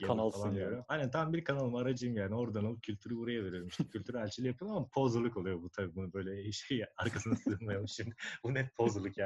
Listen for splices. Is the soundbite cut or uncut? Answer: uncut